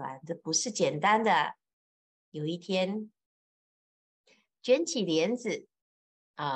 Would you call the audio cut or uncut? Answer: uncut